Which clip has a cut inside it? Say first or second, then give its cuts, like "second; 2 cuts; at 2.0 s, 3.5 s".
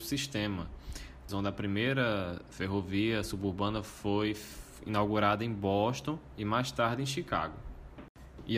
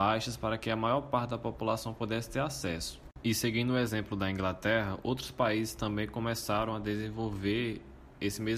first; 1 cut; at 1.3 s